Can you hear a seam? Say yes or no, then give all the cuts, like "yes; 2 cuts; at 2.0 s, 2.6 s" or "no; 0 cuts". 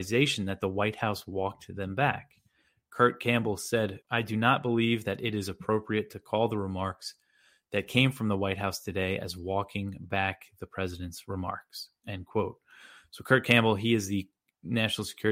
yes; 1 cut; at 4.0 s